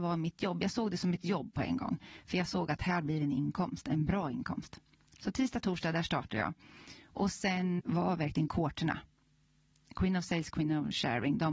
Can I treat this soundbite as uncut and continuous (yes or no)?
no